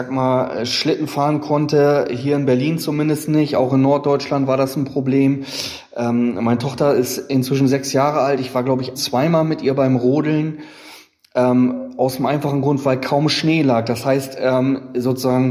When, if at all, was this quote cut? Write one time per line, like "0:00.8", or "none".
0:08.9